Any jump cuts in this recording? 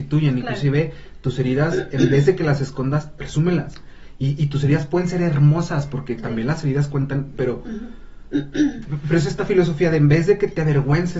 yes; 1 cut; at 7.3 s

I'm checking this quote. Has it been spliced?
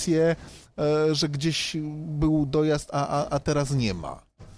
no; 0 cuts

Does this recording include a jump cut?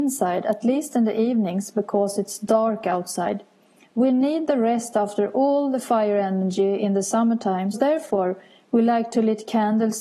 yes; 1 cut; at 7.7 s

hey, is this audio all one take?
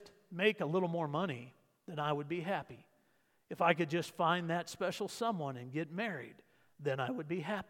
yes; 0 cuts

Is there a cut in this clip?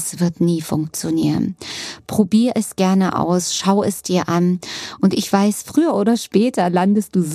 no; 0 cuts

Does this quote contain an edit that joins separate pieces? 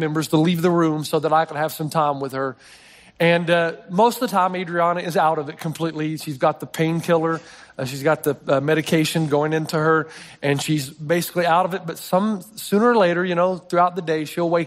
no; 0 cuts

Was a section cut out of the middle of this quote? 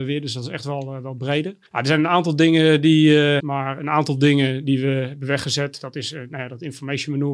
yes; 2 cuts; at 1.7 s, 3.4 s

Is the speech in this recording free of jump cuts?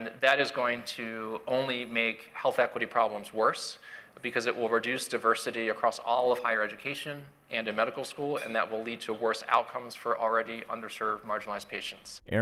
yes; 0 cuts

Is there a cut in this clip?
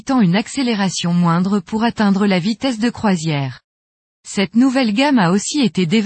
no; 0 cuts

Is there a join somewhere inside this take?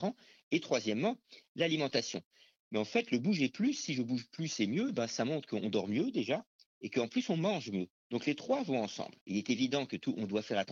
no; 0 cuts

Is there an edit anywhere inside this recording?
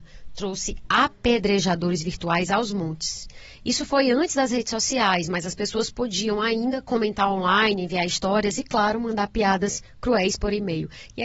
no; 0 cuts

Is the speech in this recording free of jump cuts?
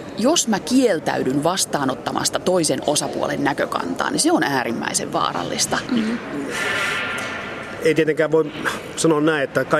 no; 1 cut; at 5.9 s

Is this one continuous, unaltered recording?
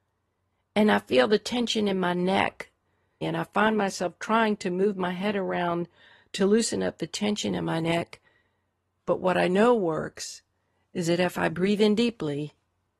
no; 2 cuts; at 3.2 s, 9.0 s

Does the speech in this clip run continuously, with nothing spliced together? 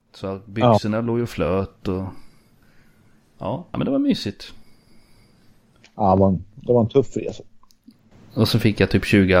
yes; 0 cuts

